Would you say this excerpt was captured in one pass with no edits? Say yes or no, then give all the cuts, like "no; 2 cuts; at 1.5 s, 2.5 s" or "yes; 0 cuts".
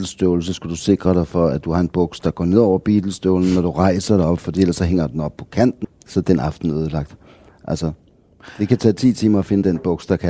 no; 1 cut; at 5.8 s